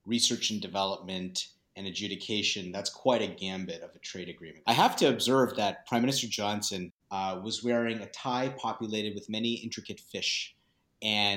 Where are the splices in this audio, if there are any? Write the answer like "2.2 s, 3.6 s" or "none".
4.6 s, 7.0 s